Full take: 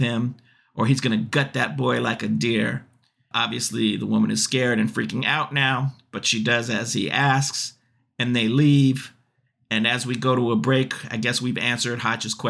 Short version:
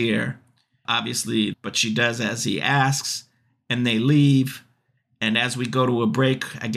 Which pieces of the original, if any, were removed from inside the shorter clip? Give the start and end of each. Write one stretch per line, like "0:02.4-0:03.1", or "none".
0:04.0-0:06.0